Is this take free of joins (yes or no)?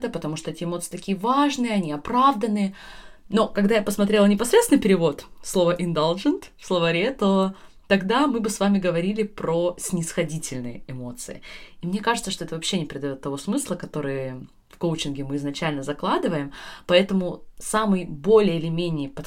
yes